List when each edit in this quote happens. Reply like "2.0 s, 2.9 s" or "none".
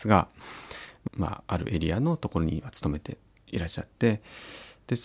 1.1 s